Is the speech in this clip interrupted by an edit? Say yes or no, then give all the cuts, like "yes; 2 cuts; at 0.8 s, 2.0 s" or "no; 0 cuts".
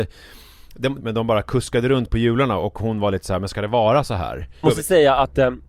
yes; 2 cuts; at 1.0 s, 4.6 s